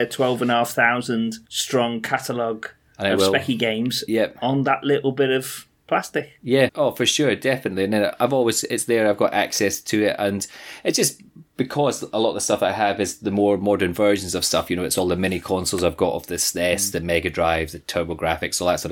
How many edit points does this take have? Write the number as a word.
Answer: two